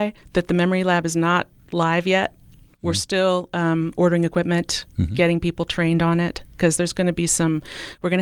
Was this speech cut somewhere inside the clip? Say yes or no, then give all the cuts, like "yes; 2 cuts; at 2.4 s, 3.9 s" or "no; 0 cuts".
no; 0 cuts